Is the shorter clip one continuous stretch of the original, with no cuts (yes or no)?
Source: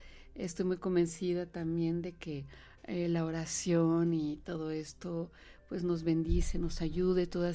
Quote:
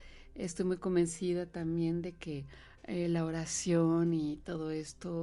yes